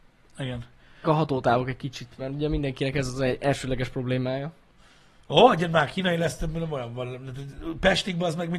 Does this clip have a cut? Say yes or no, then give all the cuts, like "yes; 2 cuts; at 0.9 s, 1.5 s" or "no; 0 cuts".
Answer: yes; 1 cut; at 1.0 s